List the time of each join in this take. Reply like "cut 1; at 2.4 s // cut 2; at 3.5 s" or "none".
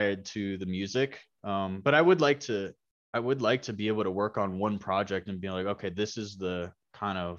none